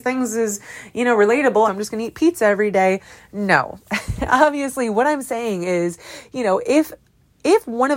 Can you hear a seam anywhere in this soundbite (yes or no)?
yes